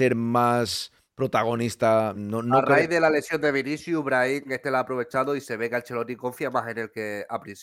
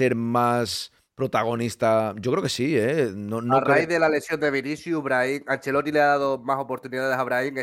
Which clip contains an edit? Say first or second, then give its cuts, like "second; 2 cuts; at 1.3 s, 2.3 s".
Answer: first; 2 cuts; at 2.1 s, 4.4 s